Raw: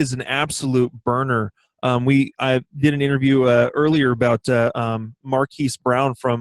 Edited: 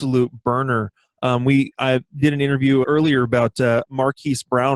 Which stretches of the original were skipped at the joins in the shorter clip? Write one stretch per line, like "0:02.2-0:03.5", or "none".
0:03.4-0:03.7
0:04.7-0:05.2